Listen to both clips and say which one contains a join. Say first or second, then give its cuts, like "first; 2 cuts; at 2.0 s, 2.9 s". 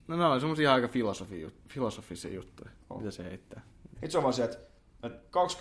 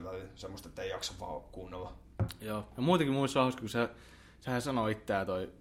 first; 1 cut; at 3.9 s